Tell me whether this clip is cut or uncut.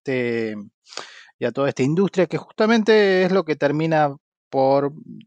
uncut